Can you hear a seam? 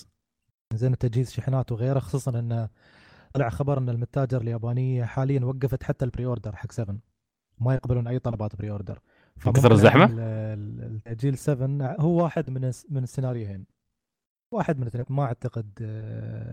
yes; 2 cuts; at 10.1 s, 15.0 s

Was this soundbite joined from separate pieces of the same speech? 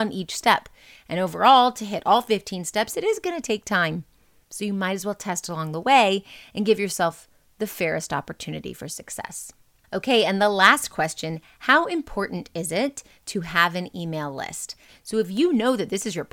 yes; 2 cuts; at 4.4 s, 14.9 s

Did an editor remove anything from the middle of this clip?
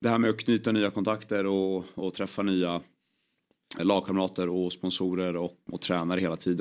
yes; 2 cuts; at 3.8 s, 5.7 s

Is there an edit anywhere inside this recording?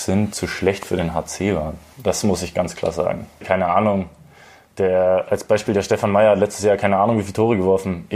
yes; 1 cut; at 3.4 s

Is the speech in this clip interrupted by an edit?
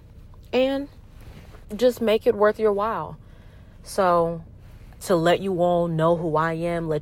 yes; 2 cuts; at 1.6 s, 5.0 s

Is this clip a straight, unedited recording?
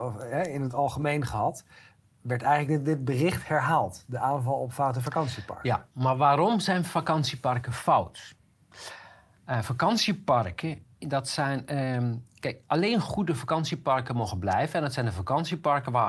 yes; 0 cuts

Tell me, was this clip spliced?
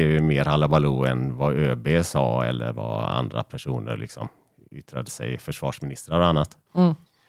no; 0 cuts

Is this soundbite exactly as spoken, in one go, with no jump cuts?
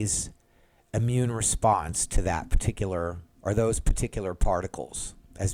yes; 0 cuts

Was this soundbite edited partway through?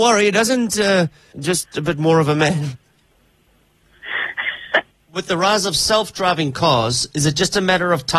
yes; 2 cuts; at 1.3 s, 4.9 s

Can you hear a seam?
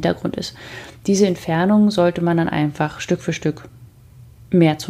no; 0 cuts

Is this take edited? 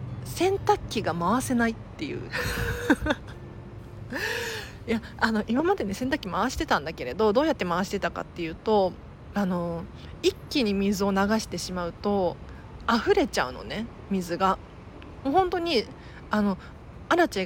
no; 0 cuts

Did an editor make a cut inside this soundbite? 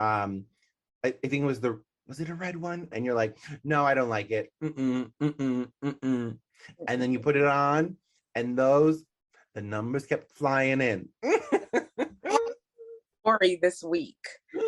yes; 1 cut; at 2.9 s

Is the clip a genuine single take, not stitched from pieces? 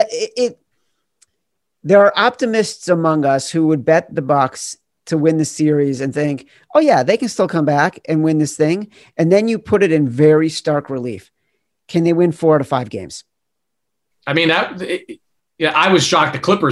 yes; 0 cuts

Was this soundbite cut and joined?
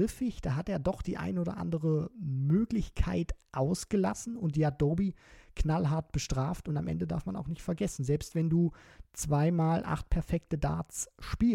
no; 0 cuts

